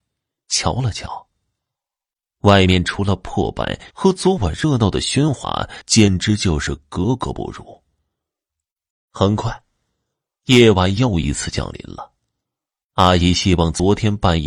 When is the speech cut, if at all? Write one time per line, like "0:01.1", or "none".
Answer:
0:03.9
0:08.9